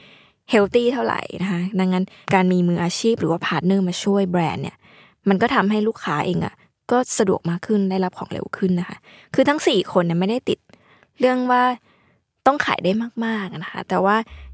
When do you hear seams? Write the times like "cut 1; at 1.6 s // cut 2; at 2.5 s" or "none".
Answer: none